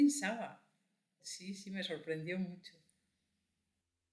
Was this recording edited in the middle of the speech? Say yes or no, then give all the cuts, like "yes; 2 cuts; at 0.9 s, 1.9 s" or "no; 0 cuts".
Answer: no; 0 cuts